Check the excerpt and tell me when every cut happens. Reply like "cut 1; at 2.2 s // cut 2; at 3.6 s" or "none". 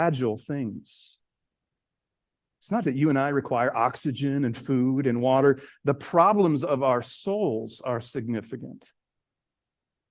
cut 1; at 2.8 s